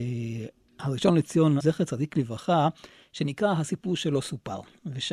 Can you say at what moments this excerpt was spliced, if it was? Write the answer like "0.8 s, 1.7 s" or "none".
1.6 s